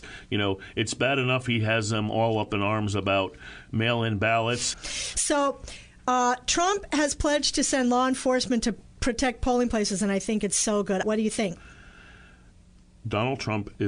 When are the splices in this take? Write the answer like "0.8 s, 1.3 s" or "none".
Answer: 4.7 s, 11.0 s